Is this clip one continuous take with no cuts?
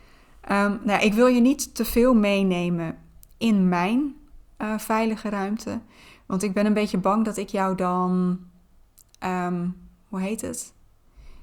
yes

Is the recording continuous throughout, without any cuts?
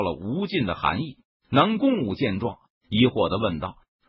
no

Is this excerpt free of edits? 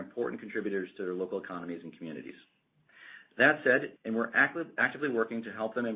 no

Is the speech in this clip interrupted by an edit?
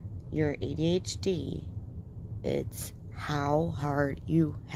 no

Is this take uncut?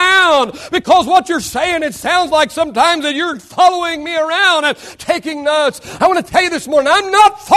yes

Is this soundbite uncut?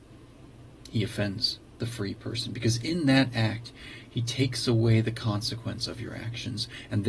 yes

